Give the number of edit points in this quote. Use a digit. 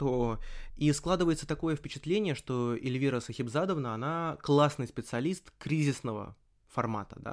0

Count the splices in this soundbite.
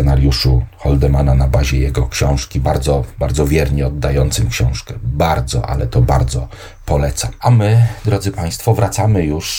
0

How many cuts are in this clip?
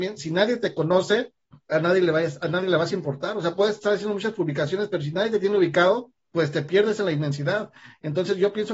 1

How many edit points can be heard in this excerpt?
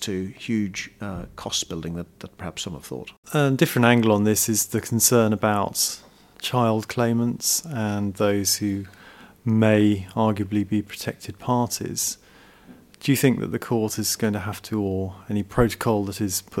0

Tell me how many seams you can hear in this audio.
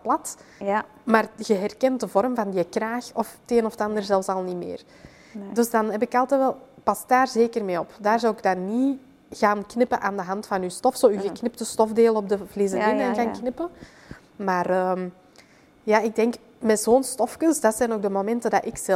0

